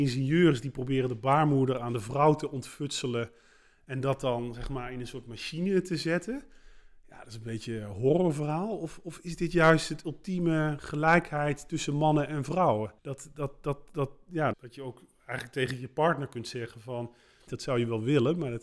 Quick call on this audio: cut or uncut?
cut